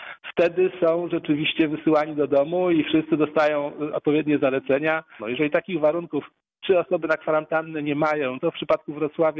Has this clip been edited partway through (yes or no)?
yes